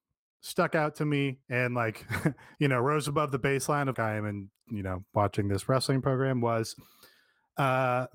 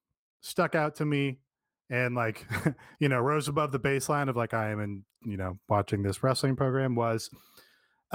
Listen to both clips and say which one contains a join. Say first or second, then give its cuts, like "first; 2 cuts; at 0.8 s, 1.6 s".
first; 2 cuts; at 1.4 s, 3.9 s